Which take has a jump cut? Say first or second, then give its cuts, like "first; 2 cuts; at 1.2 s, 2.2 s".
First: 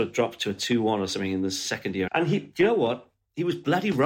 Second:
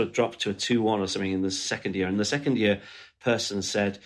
first; 1 cut; at 2.1 s